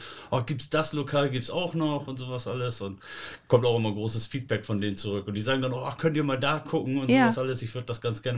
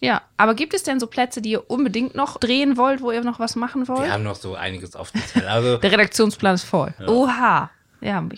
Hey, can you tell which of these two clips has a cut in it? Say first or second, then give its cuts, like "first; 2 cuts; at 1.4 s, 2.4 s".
second; 1 cut; at 7.0 s